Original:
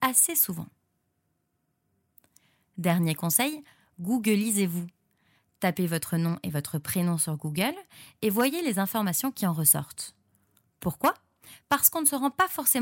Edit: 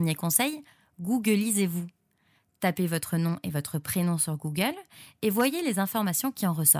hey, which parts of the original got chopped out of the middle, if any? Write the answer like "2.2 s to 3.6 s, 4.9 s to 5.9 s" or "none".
none

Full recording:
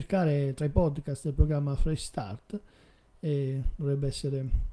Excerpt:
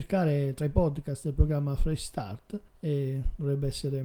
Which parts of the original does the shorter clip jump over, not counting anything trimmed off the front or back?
2.7 s to 3.1 s

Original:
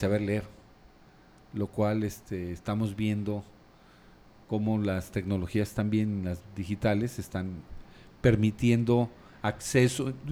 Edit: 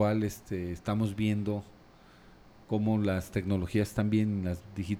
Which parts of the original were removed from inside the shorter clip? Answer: none

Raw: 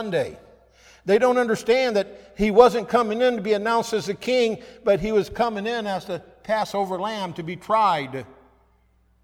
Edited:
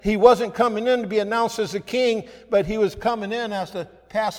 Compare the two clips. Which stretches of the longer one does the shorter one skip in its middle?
none

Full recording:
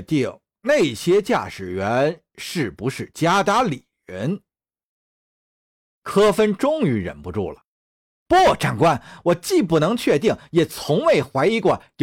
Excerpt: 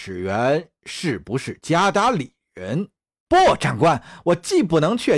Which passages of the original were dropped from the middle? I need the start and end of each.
4.7 s to 8.2 s

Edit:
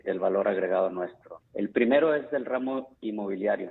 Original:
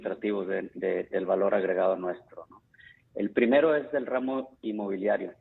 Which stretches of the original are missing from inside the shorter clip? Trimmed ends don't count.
2.5 s to 3.0 s

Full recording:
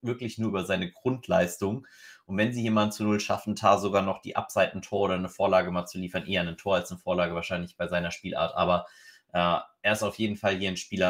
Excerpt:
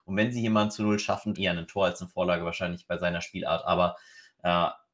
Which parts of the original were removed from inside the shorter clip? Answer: 3.6 s to 6.2 s

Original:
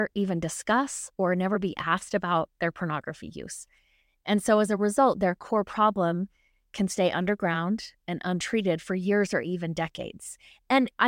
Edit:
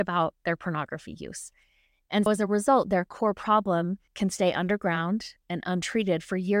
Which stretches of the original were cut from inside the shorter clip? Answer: 4.4 s to 4.6 s, 6.4 s to 6.7 s

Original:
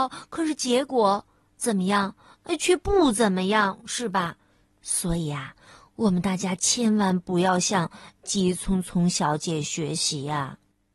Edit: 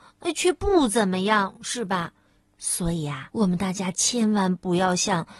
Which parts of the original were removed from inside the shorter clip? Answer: 5.5 s to 5.9 s

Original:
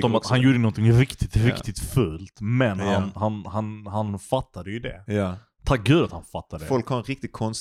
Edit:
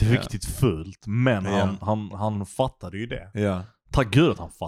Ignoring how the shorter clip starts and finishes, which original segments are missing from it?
3.4 s to 3.8 s

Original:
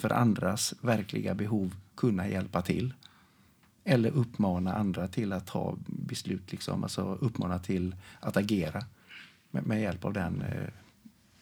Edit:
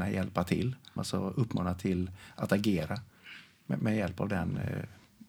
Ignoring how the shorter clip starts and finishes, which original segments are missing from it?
3.1 s to 6.8 s

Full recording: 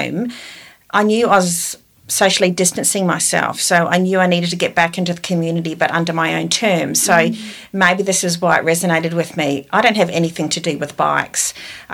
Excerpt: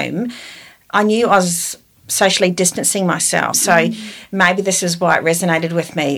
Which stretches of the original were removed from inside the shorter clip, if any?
3.5 s to 6.9 s

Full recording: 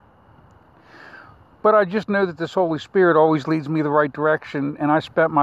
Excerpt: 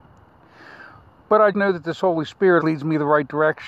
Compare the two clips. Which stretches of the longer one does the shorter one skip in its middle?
1.9 s to 2.1 s, 3.1 s to 3.4 s

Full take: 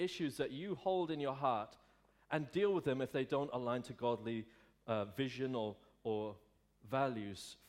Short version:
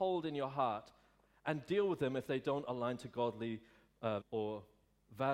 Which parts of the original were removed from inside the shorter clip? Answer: 5.1 s to 5.9 s

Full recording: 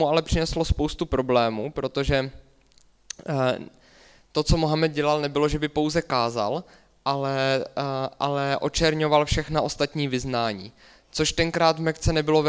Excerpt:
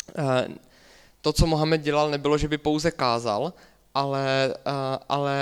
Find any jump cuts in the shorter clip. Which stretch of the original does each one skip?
none

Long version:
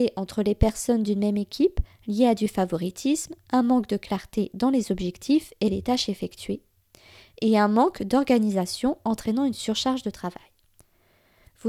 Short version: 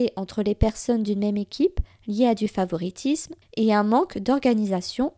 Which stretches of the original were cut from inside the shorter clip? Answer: 3.4 s to 7.3 s

